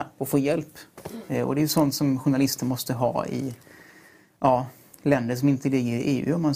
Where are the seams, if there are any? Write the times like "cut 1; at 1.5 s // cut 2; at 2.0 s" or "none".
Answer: none